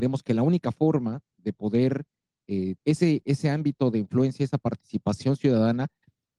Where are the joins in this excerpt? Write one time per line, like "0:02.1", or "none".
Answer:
0:02.8